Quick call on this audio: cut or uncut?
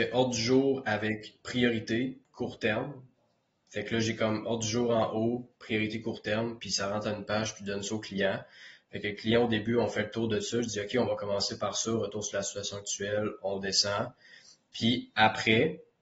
uncut